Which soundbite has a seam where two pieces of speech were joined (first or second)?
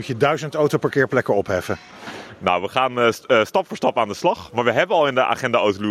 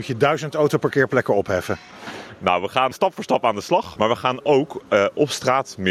second